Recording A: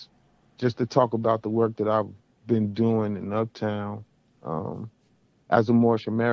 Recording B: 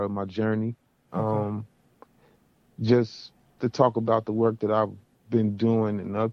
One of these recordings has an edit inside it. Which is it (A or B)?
B